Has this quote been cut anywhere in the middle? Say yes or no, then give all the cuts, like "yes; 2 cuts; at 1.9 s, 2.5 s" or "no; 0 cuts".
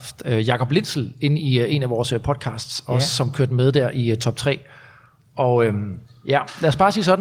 no; 0 cuts